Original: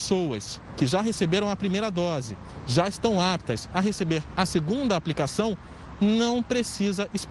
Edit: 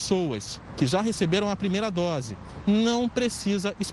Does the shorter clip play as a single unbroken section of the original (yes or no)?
no